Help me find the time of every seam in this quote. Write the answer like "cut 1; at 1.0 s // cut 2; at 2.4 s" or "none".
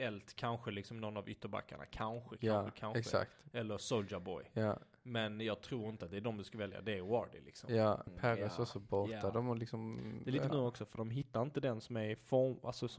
cut 1; at 8.1 s // cut 2; at 10.5 s